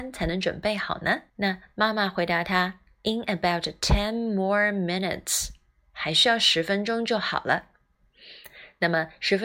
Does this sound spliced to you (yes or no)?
yes